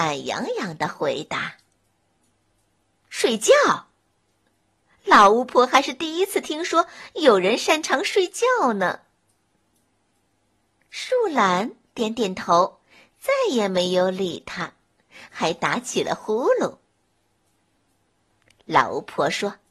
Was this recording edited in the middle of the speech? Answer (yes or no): no